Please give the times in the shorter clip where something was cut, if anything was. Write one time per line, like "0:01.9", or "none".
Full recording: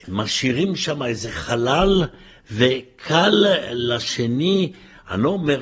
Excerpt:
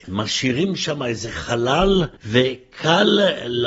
0:02.2